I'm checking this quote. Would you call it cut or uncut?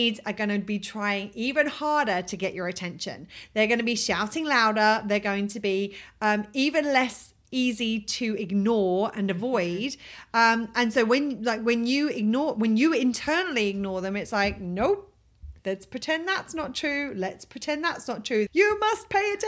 cut